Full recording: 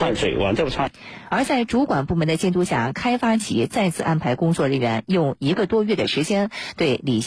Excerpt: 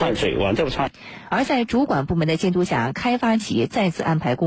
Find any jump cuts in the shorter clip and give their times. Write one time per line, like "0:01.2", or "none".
none